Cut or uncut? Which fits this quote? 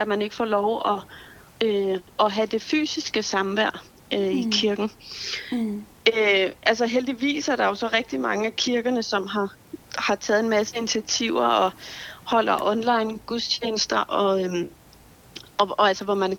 uncut